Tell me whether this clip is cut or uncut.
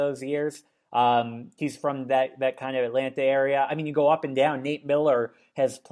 uncut